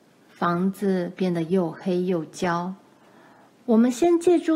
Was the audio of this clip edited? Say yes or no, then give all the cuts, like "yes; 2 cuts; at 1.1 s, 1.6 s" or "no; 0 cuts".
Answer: no; 0 cuts